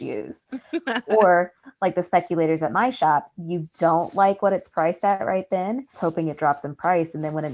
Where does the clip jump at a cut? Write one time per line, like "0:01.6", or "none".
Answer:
0:03.3
0:05.9